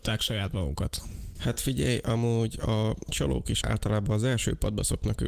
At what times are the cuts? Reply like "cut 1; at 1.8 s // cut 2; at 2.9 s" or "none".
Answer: cut 1; at 1.4 s // cut 2; at 3.6 s